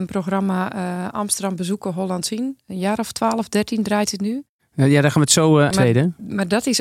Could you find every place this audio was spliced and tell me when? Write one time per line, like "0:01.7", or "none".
0:05.7